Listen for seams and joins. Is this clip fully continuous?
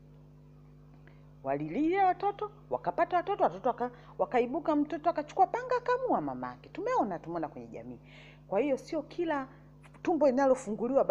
yes; 0 cuts

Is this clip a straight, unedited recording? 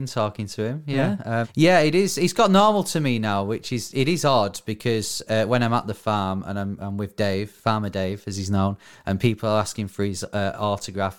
no; 1 cut; at 1.4 s

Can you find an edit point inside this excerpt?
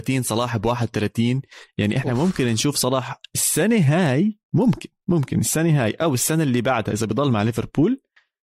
no; 0 cuts

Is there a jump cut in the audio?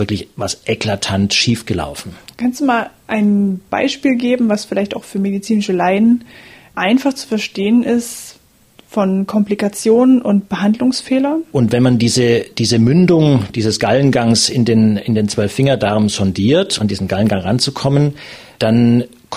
yes; 3 cuts; at 2.3 s, 11.5 s, 16.8 s

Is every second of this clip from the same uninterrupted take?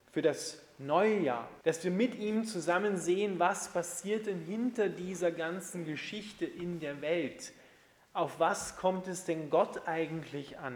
no; 1 cut; at 1.6 s

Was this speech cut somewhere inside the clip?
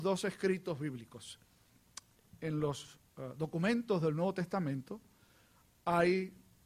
no; 0 cuts

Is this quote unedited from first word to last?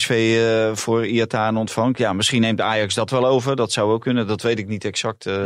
yes; 0 cuts

